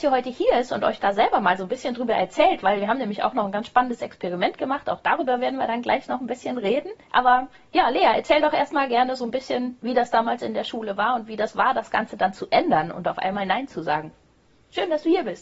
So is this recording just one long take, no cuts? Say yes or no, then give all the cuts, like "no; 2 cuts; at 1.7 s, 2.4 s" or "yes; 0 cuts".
no; 2 cuts; at 2.6 s, 7.0 s